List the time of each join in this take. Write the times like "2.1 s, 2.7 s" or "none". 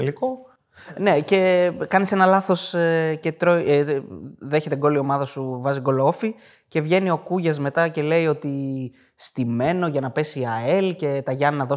none